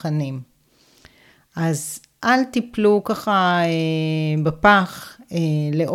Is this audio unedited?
yes; 0 cuts

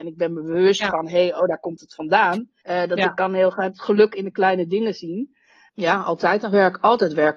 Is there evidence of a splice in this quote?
yes; 2 cuts; at 2.6 s, 5.7 s

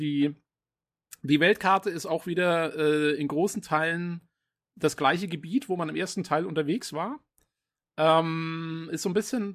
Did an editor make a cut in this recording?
no; 0 cuts

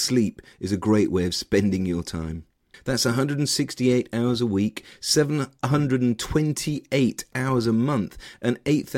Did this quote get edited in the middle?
yes; 1 cut; at 2.7 s

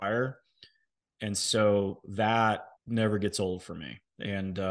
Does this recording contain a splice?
yes; 1 cut; at 2.8 s

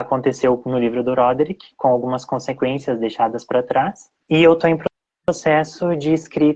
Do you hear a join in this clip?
yes; 1 cut; at 4.2 s

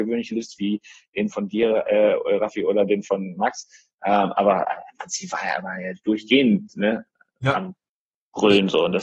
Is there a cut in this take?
yes; 1 cut; at 1.3 s

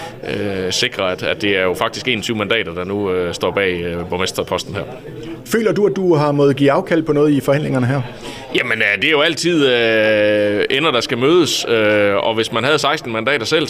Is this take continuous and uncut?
yes; 0 cuts

